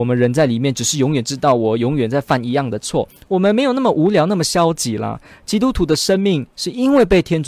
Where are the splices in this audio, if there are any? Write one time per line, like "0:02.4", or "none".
none